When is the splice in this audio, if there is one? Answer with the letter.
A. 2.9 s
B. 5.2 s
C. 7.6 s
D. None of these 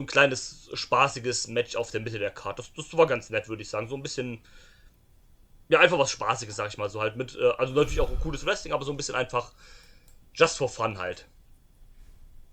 D